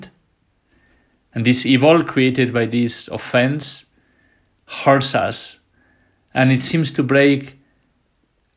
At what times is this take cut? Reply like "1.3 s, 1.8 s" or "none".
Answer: none